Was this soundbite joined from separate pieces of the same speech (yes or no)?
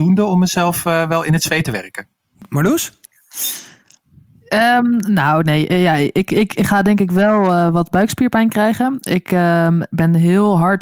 no